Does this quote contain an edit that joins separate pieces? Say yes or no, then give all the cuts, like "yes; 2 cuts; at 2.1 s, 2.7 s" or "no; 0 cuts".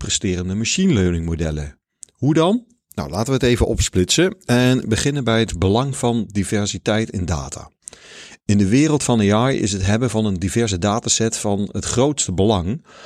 no; 0 cuts